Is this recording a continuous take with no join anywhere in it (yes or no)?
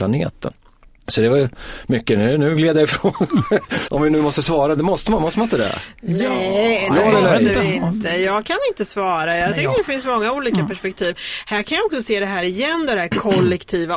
no